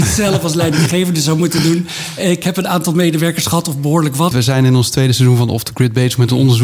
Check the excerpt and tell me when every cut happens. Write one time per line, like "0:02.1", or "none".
0:04.3